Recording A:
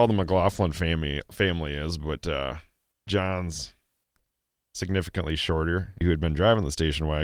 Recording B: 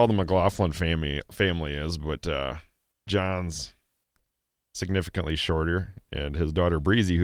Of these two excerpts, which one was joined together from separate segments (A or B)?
A